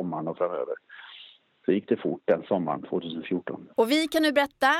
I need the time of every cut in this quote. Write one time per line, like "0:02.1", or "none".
0:03.7